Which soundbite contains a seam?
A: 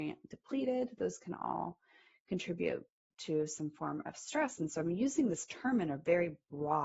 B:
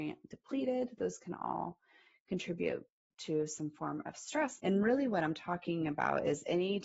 B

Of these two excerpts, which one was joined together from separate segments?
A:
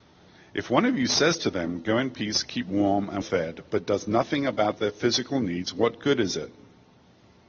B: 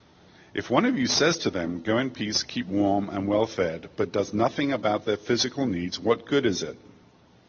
A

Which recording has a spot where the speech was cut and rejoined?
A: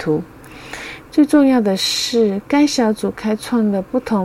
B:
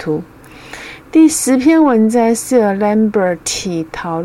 A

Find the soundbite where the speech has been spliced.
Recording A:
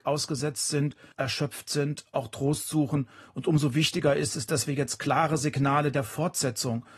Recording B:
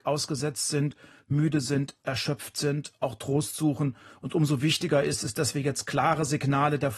A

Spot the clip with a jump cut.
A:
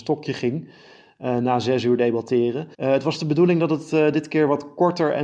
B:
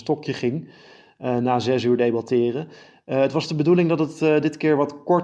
A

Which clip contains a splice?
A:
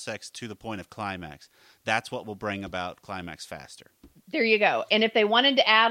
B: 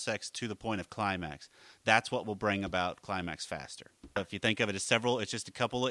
B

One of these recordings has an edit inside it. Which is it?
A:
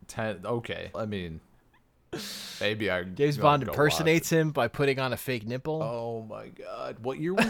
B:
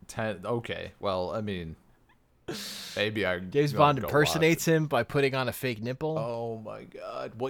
A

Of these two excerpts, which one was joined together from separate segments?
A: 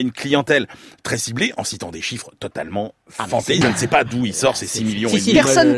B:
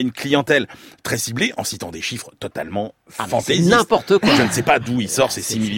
A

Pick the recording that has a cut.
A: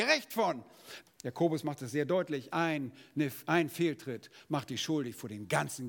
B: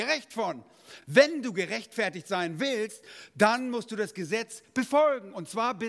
A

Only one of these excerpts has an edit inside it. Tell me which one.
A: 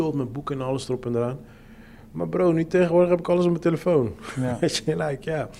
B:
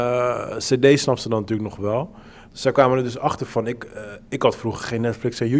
B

